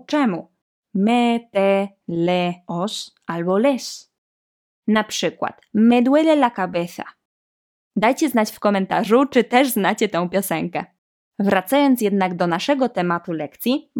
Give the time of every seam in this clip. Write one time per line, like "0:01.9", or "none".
0:02.6
0:07.8